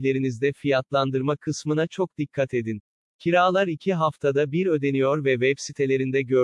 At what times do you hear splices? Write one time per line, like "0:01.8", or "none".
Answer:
0:03.0